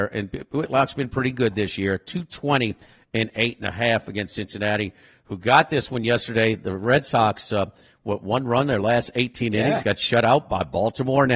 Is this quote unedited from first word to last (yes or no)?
yes